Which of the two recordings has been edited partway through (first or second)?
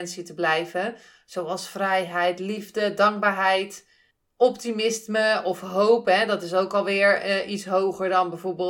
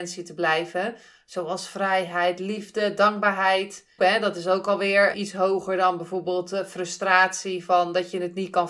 second